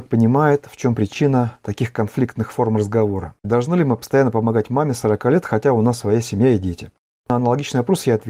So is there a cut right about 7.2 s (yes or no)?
no